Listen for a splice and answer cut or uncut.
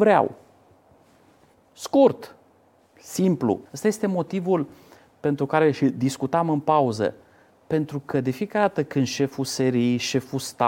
cut